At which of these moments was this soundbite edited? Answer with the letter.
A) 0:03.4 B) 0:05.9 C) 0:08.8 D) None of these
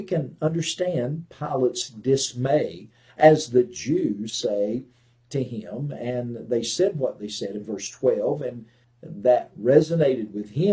C